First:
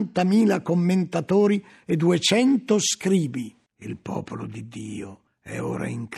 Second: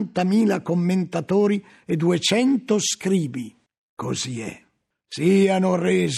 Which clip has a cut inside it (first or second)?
first